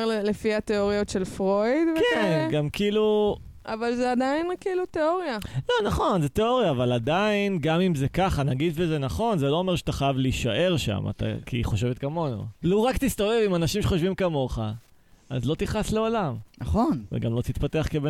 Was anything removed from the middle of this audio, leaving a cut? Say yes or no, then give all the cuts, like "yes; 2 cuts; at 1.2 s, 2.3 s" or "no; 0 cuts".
yes; 2 cuts; at 11.4 s, 12.6 s